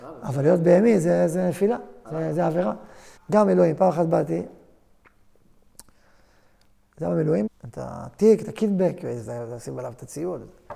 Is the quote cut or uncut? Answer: cut